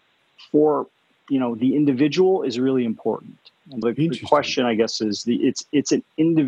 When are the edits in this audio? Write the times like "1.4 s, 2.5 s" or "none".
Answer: 3.8 s

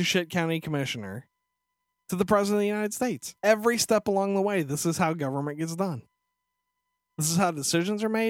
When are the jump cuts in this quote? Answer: 3.4 s

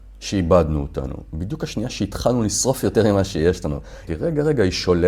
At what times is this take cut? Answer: 4.1 s

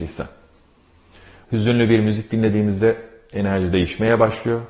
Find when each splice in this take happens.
1.4 s

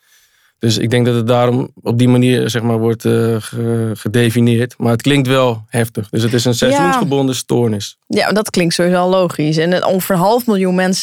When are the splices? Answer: none

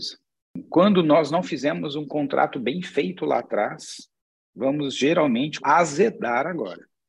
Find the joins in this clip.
5.6 s

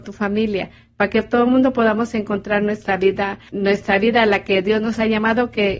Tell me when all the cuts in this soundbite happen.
none

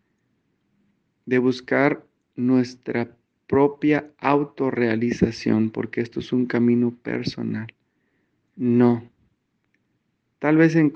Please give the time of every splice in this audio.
8.5 s

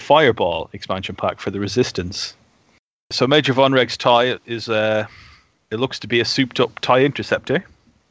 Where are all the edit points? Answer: none

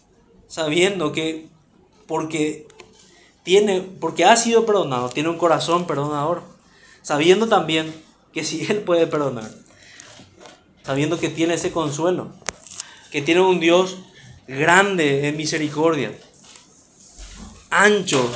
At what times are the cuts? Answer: 10.8 s, 14.4 s

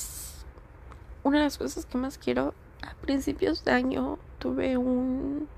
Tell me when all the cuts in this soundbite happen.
2.8 s

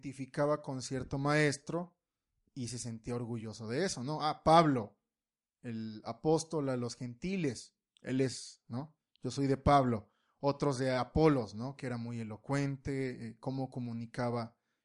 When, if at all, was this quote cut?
none

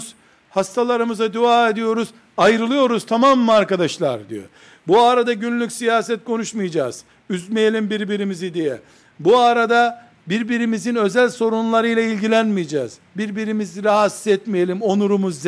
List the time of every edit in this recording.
none

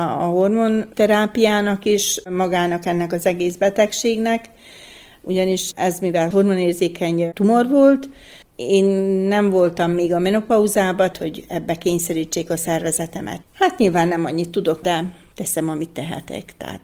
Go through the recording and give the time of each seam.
11.1 s, 13.4 s, 14.8 s

